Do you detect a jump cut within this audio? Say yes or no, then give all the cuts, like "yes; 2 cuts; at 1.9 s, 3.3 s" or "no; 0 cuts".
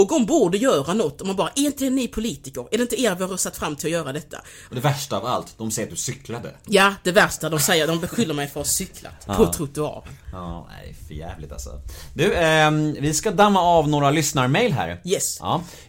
yes; 1 cut; at 4.7 s